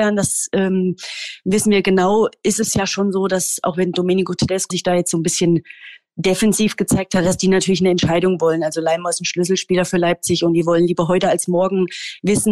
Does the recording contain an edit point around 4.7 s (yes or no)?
yes